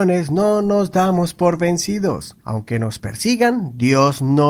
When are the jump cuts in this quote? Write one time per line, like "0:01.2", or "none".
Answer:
0:02.4

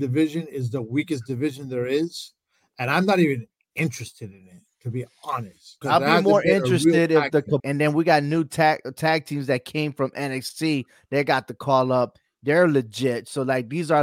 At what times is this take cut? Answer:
0:05.8
0:07.6

